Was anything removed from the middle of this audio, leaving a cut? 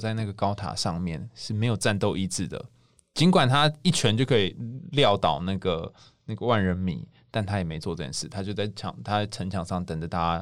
no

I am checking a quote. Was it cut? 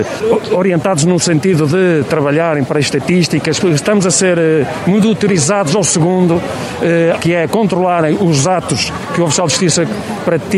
yes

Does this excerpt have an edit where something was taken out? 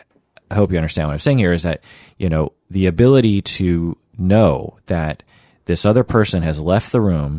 no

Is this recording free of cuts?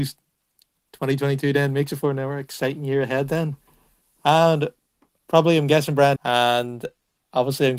no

